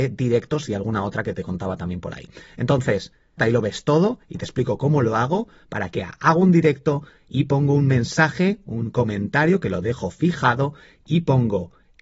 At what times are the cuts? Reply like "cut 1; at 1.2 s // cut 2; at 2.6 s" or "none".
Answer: cut 1; at 3.4 s